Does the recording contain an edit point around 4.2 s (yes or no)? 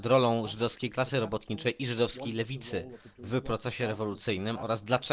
no